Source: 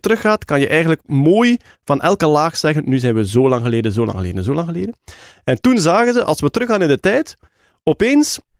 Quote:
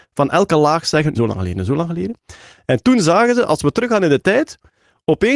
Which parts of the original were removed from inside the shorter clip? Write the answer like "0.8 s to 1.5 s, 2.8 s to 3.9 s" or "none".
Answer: 2.9 s to 3.9 s